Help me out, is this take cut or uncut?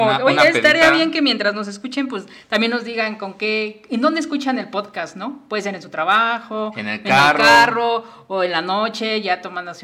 uncut